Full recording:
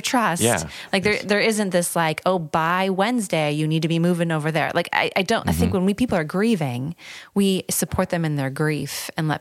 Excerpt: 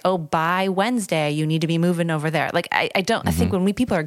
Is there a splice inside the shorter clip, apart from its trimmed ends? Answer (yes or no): no